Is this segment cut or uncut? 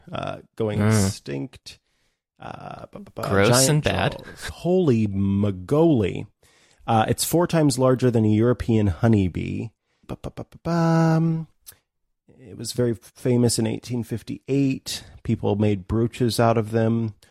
cut